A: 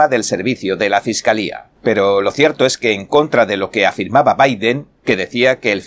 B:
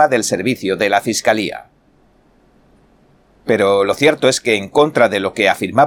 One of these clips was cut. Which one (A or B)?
A